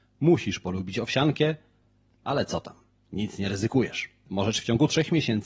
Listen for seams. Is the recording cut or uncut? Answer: uncut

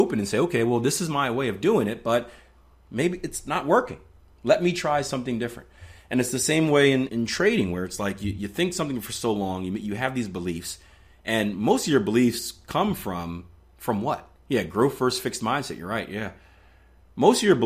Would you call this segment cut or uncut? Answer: cut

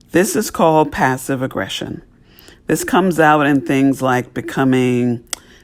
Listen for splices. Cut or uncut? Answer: uncut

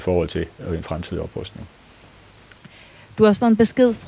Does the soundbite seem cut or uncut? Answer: uncut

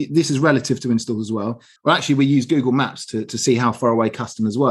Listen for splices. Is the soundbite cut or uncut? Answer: cut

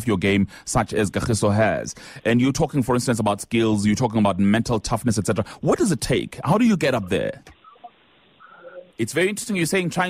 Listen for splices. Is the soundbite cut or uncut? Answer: cut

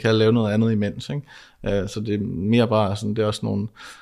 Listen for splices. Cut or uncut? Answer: uncut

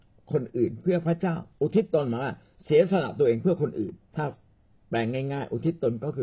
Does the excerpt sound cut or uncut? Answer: cut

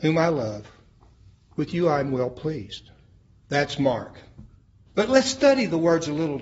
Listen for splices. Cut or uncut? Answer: cut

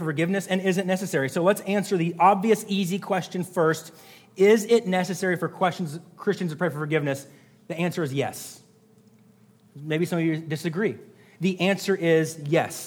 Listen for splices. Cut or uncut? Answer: uncut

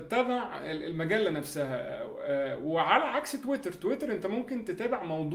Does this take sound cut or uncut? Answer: uncut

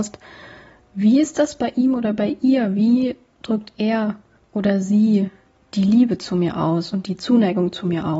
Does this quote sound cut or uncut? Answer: uncut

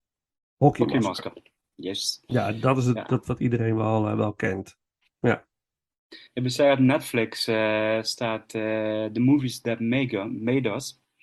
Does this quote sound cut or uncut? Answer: uncut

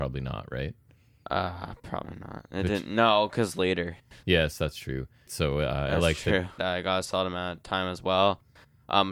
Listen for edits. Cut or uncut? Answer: cut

